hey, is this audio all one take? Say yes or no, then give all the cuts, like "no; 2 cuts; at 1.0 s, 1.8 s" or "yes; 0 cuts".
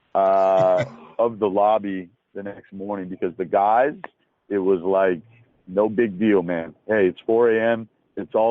yes; 0 cuts